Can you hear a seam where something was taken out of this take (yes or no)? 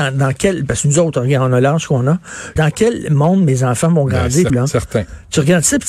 yes